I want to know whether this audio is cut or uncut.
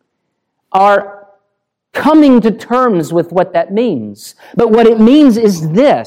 uncut